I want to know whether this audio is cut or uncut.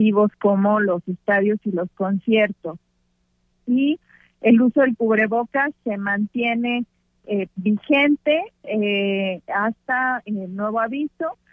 uncut